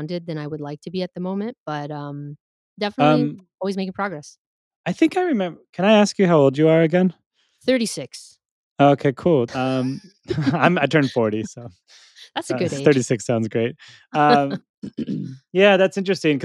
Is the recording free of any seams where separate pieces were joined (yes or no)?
no